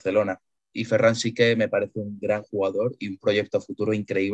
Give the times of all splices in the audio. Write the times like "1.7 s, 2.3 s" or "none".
2.2 s

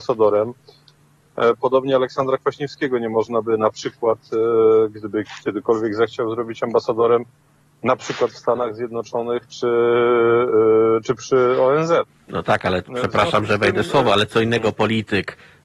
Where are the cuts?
none

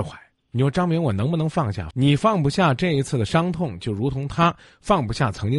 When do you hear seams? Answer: 1.9 s

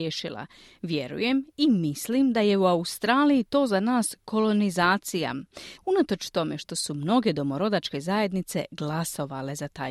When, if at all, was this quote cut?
5.8 s

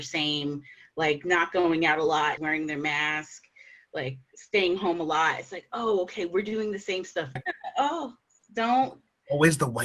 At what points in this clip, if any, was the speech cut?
2.4 s, 7.4 s

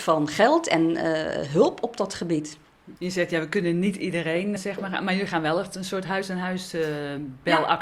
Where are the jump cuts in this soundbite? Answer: 3.0 s, 4.6 s

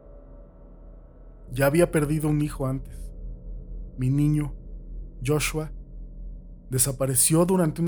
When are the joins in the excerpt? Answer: 1.5 s

